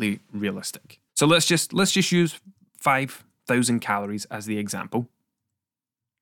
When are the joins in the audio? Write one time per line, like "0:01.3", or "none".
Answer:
0:01.1